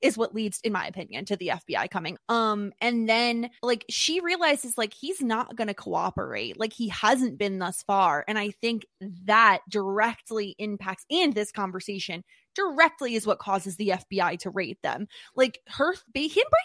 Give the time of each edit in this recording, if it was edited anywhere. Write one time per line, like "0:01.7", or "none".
0:02.1
0:03.6